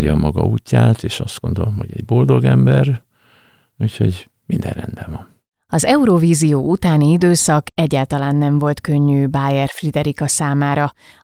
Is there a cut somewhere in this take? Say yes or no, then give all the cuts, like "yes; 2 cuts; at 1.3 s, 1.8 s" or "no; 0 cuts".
no; 0 cuts